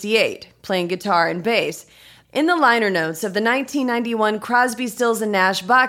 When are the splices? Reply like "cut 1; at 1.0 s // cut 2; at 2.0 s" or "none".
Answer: cut 1; at 2.2 s